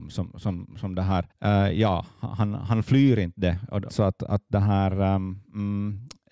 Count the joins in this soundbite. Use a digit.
2